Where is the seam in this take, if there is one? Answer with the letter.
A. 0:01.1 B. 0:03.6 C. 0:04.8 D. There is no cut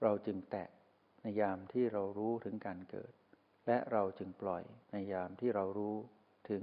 C